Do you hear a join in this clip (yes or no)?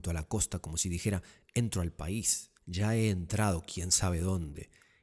yes